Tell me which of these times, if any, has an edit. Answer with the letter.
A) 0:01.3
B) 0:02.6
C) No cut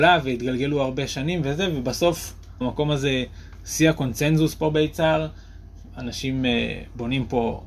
B